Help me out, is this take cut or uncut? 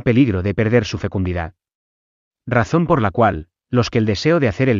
uncut